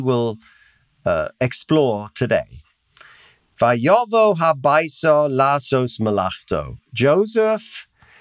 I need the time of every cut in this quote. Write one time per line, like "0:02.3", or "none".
none